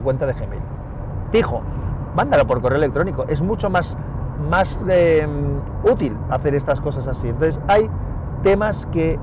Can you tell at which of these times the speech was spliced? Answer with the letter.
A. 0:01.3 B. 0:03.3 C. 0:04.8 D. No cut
A